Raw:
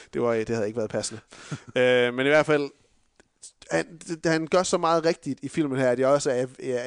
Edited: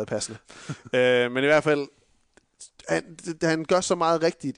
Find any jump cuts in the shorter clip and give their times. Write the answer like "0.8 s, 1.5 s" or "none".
none